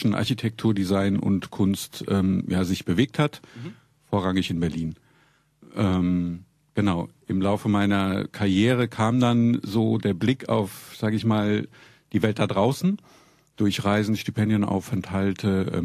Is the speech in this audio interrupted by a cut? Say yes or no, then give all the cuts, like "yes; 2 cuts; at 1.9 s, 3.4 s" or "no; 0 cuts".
no; 0 cuts